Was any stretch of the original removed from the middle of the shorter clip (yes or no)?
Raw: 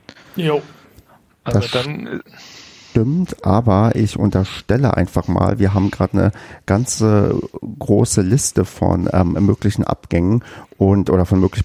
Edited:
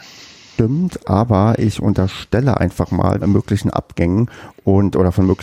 yes